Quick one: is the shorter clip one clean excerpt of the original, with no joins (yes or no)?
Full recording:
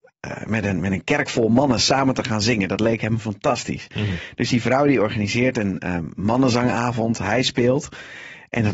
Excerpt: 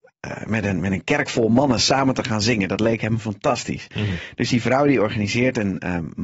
yes